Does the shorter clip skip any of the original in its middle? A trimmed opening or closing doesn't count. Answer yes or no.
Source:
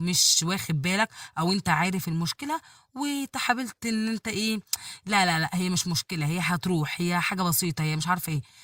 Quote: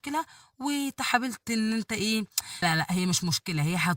yes